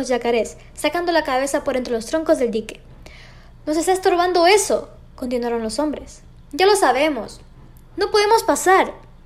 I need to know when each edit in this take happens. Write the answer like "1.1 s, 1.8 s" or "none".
none